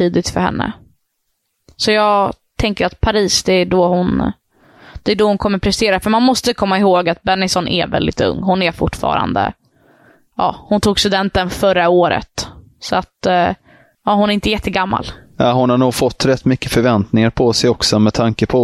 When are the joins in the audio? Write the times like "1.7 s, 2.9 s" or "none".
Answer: none